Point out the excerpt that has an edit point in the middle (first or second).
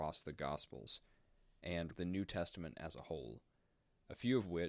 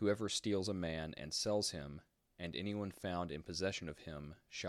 first